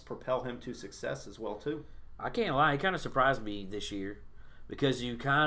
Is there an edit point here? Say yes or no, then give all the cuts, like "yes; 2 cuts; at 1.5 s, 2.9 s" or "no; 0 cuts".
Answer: no; 0 cuts